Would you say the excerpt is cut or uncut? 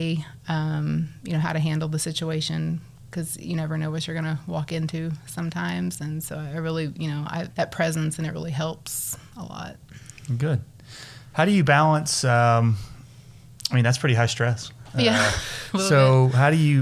cut